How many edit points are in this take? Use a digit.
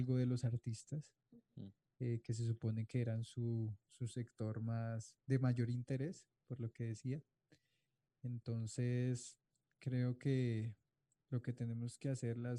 0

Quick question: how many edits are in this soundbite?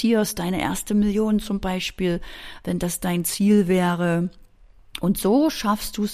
0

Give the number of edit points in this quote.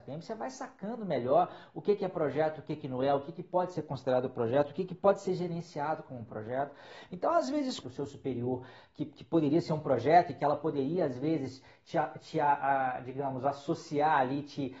1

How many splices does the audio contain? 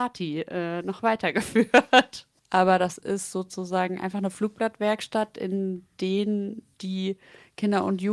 1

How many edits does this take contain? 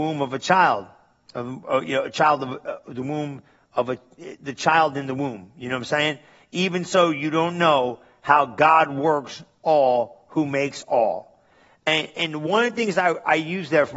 0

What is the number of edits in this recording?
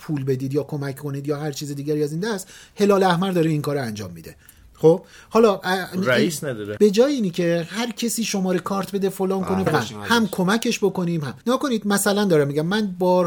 3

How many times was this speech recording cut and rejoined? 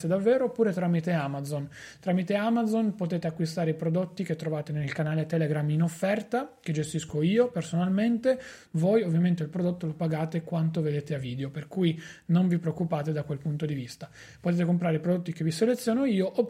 1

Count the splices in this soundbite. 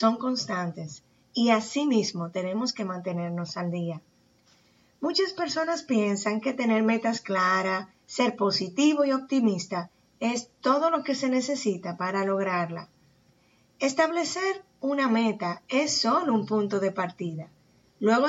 0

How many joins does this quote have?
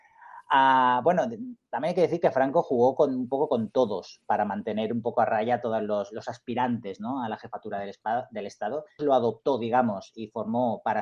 1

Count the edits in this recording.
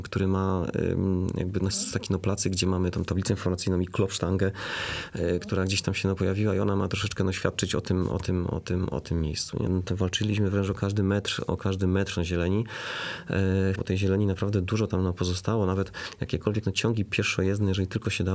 3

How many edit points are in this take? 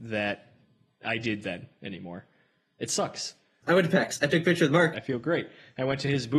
2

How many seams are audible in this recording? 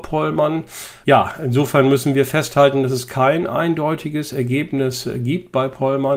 1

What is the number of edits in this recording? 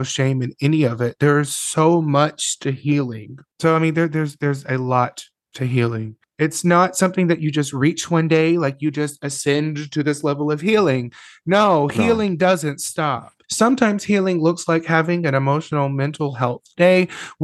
2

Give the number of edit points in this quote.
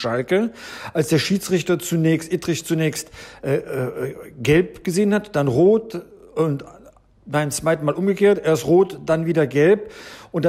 1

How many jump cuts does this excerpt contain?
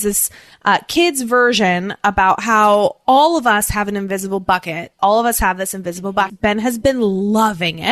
2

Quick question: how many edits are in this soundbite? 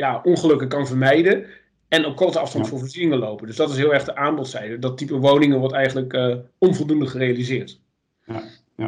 0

